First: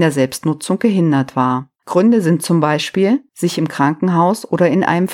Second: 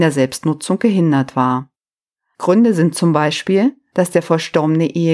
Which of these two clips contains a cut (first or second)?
first